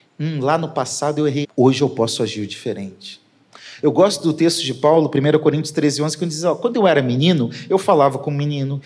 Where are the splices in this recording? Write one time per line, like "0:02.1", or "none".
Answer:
0:01.4

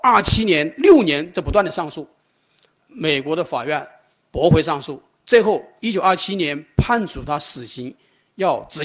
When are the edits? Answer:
0:02.8

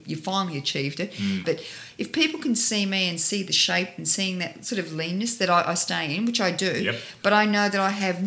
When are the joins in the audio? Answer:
0:01.4

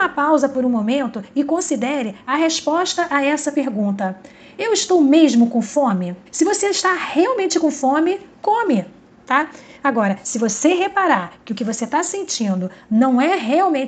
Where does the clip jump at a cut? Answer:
0:06.3

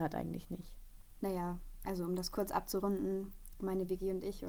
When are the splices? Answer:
0:01.2
0:03.5

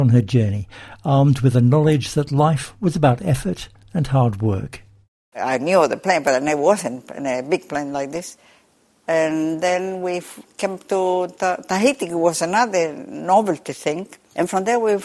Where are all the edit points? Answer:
0:05.3

